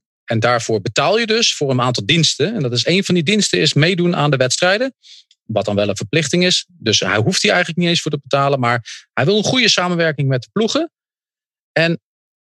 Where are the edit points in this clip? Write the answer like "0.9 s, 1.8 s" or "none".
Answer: none